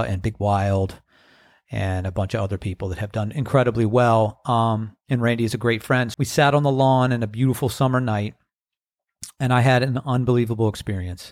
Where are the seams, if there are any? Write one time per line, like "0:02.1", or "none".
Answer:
0:06.1